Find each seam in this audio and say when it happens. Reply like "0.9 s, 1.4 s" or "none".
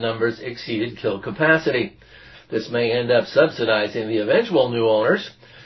2.3 s